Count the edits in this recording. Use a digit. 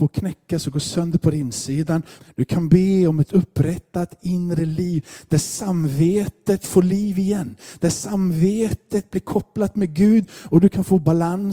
1